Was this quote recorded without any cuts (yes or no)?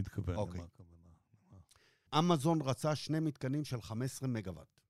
no